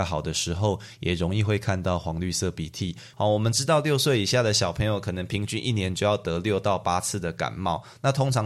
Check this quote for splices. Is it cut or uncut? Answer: cut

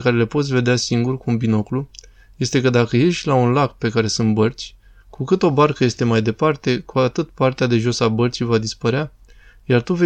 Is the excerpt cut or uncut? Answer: uncut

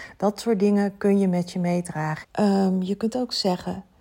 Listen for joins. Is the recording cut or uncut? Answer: cut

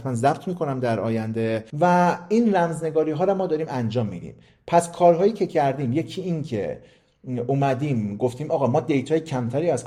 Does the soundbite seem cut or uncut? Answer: cut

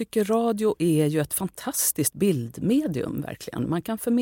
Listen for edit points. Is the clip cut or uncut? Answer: uncut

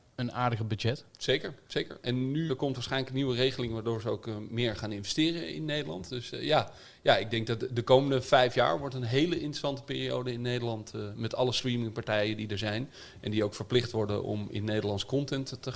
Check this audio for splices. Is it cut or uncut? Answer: cut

